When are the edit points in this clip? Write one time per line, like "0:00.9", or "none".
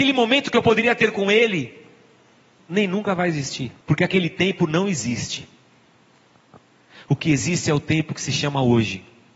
0:02.6
0:03.8